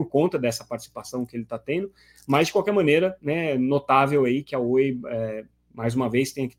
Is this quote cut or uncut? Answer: uncut